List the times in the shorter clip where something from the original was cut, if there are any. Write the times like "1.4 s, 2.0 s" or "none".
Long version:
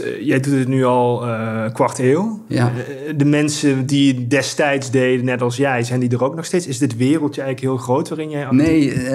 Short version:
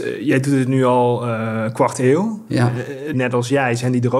3.1 s